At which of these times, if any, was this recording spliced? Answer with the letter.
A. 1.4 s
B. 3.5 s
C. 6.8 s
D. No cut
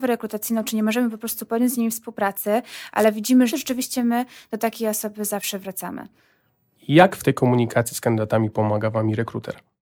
B